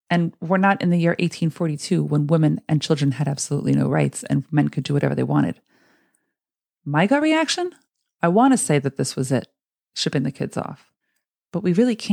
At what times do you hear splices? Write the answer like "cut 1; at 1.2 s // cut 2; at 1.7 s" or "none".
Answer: none